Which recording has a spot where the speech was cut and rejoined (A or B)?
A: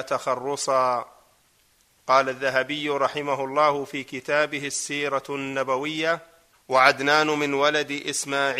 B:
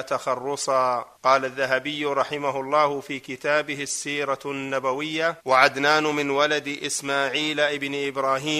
B